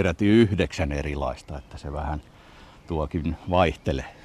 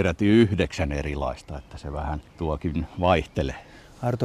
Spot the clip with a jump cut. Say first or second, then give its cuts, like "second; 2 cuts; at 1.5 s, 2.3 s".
second; 1 cut; at 2.3 s